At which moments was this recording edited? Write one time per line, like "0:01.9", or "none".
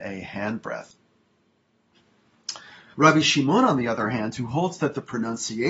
0:02.9